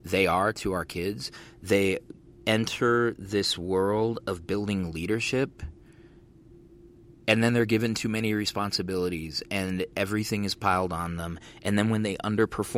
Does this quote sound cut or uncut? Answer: uncut